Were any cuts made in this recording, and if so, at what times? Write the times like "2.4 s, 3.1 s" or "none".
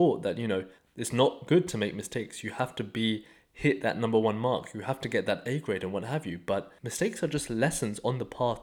none